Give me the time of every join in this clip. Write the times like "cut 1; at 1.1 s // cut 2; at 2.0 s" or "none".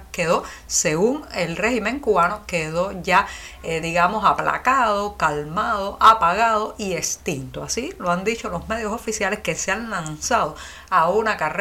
none